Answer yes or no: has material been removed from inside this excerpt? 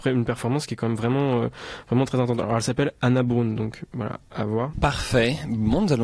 yes